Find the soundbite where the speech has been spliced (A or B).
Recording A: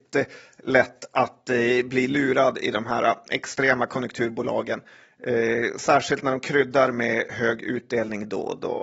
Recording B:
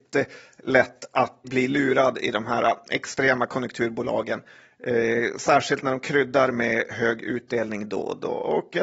B